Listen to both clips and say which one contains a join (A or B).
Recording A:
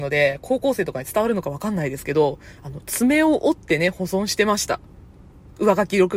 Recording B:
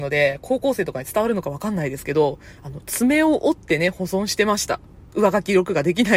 B